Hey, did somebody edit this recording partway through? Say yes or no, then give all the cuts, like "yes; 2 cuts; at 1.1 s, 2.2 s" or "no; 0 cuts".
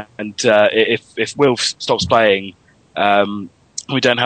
no; 0 cuts